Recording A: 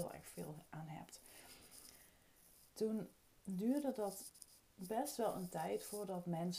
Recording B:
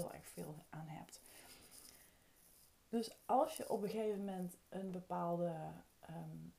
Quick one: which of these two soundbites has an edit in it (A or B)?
A